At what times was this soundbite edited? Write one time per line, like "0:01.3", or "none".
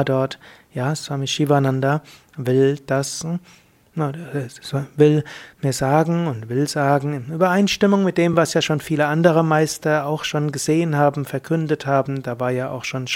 none

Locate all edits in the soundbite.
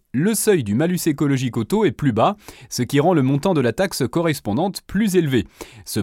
none

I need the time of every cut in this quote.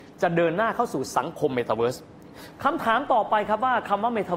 none

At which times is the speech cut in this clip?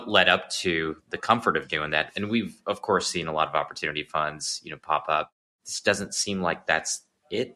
none

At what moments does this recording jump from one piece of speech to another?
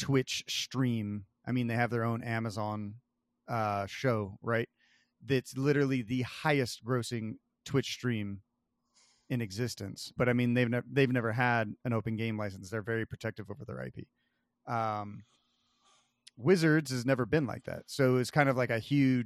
0:10.2

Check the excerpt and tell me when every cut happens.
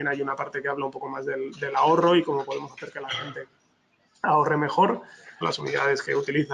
0:05.4

